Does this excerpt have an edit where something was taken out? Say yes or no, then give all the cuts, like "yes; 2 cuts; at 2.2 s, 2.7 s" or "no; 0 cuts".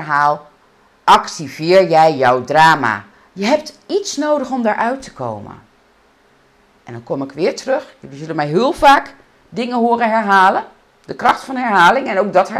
yes; 1 cut; at 3.3 s